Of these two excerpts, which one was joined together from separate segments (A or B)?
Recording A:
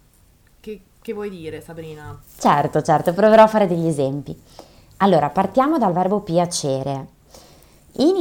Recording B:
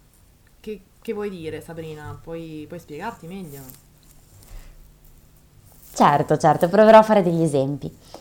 A